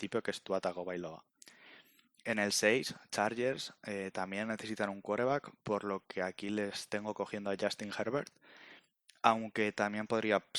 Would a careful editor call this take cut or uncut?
uncut